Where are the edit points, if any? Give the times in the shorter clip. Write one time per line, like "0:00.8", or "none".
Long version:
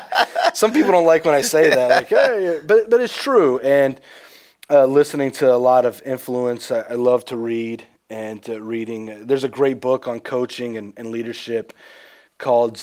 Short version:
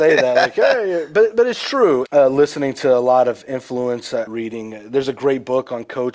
0:02.1
0:04.3